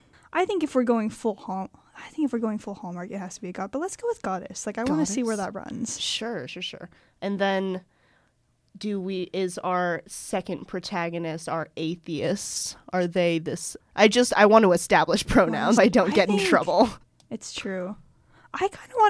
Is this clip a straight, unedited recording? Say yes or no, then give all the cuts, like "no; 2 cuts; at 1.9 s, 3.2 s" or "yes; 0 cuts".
no; 3 cuts; at 6.5 s, 13.8 s, 15.8 s